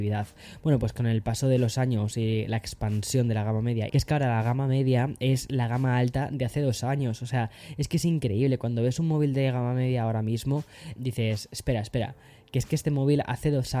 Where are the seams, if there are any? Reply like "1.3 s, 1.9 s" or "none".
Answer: 3.9 s, 11.0 s